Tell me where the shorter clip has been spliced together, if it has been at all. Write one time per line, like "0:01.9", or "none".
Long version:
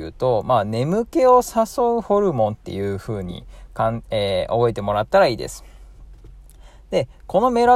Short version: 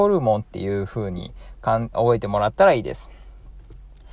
0:01.9

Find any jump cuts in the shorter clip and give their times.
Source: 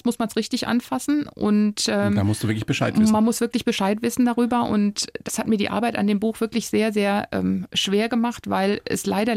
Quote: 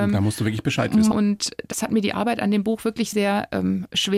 0:01.1
0:03.1

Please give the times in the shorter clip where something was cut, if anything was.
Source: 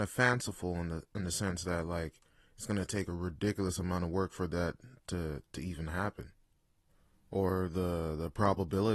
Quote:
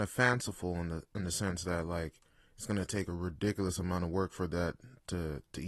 none

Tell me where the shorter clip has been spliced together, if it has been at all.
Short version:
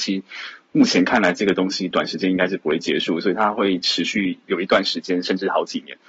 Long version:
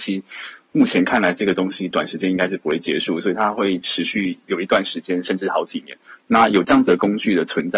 none

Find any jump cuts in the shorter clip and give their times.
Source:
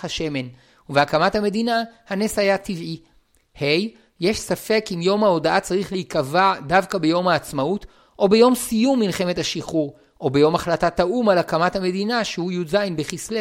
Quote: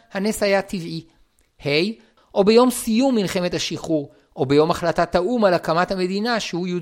0:02.2

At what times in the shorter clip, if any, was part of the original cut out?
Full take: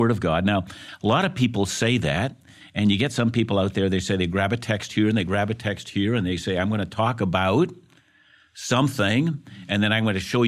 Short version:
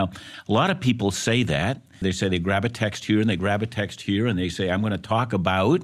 0:02.0

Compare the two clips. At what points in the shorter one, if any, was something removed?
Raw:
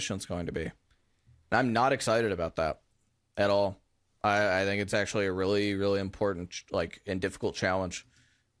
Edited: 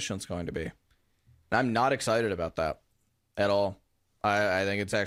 none

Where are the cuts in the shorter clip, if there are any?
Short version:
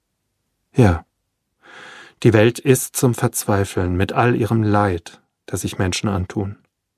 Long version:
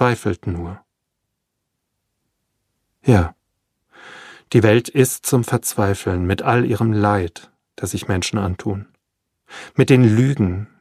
none

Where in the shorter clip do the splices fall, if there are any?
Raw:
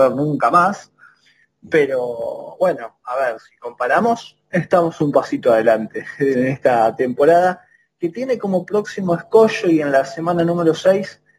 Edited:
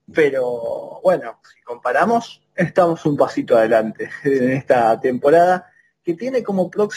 0:01.4

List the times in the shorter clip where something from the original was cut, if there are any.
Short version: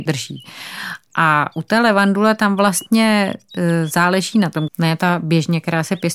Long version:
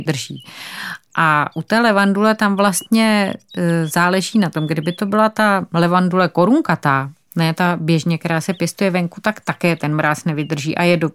0:04.7

